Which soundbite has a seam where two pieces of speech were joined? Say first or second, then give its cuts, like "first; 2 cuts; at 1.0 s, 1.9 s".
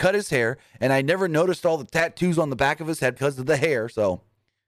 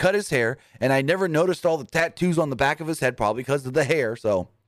first; 1 cut; at 3.2 s